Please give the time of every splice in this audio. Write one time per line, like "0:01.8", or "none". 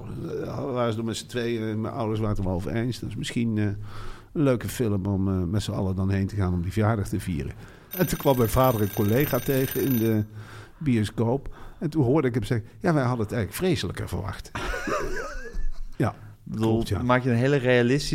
0:07.9
0:15.9